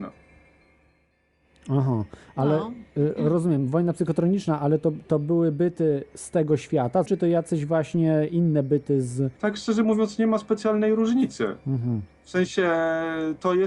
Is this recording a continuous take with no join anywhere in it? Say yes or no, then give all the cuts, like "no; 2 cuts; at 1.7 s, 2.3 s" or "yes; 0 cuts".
no; 2 cuts; at 7.1 s, 9.4 s